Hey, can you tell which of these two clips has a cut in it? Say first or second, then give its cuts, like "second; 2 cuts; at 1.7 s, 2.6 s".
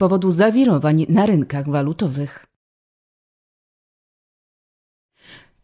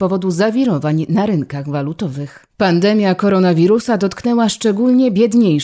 second; 1 cut; at 2.5 s